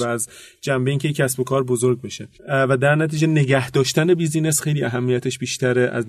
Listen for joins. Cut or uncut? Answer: cut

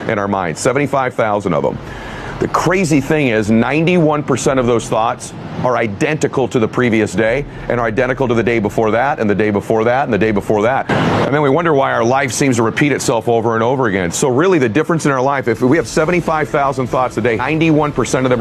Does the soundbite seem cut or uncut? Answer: cut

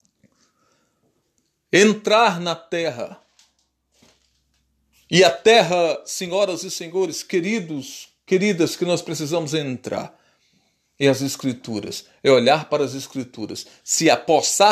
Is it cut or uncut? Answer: uncut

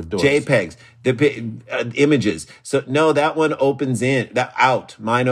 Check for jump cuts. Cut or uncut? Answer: uncut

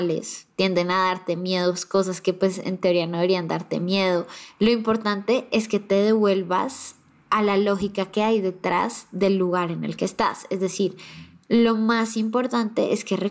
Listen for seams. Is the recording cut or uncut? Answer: uncut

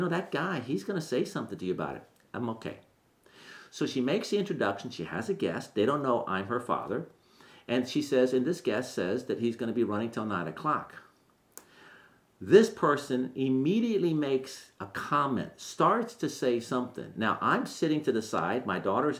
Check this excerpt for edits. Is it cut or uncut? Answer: uncut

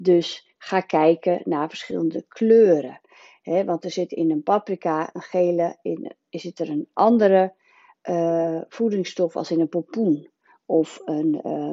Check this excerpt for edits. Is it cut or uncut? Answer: uncut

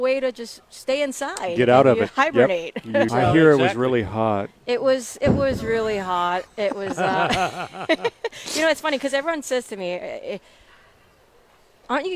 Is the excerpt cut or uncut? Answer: cut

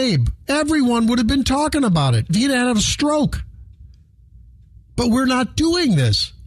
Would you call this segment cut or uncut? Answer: cut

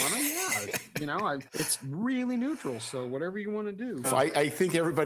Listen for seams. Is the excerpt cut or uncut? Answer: cut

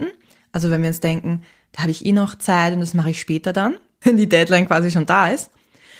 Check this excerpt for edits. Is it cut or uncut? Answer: cut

